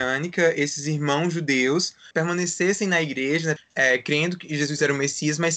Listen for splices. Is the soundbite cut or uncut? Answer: cut